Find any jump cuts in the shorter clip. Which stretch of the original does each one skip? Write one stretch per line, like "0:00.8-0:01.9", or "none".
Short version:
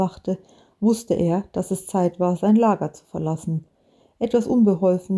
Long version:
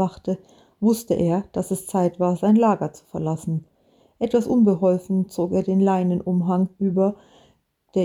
none